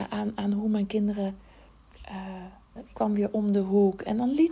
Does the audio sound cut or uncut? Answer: cut